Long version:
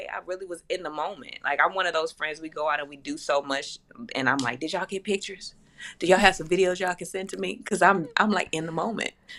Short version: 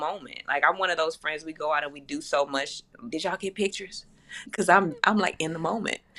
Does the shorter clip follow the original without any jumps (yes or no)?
no